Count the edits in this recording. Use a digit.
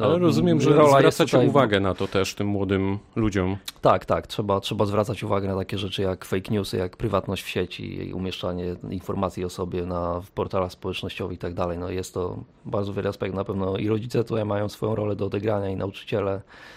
0